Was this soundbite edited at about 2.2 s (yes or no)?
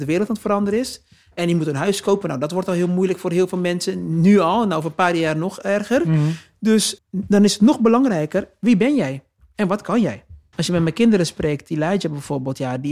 no